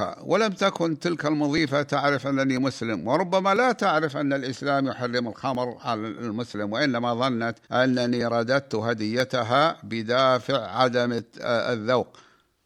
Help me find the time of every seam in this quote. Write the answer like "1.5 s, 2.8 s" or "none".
7.6 s